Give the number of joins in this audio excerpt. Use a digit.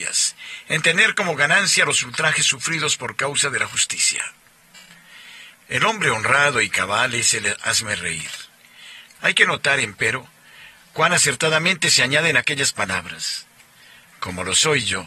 2